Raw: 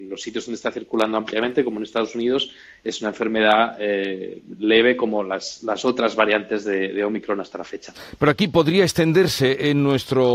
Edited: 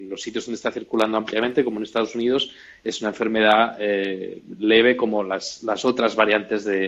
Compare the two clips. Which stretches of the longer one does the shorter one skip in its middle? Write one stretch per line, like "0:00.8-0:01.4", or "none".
none